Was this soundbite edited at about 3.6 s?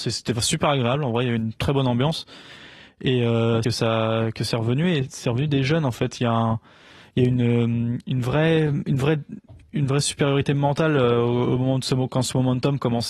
yes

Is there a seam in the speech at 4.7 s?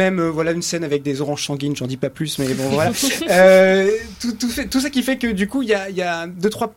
no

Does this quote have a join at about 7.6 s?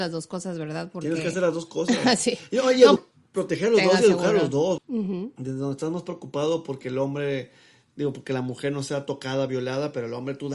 no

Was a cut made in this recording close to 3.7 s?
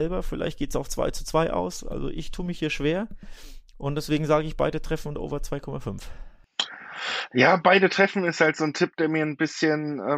no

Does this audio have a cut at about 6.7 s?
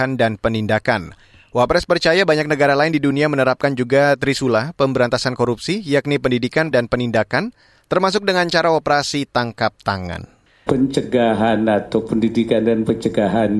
yes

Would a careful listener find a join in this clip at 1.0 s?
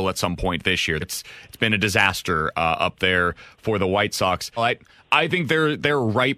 yes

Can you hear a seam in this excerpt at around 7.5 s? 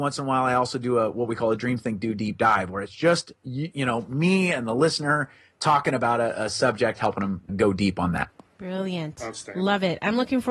yes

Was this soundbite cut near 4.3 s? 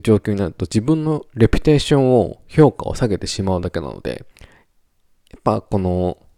yes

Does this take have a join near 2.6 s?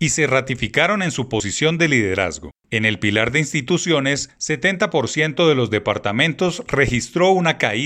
yes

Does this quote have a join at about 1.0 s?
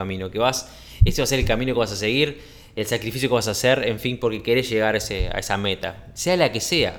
no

